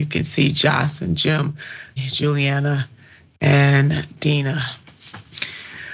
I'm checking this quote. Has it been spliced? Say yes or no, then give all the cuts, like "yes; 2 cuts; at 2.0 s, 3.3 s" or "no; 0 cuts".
yes; 1 cut; at 2.0 s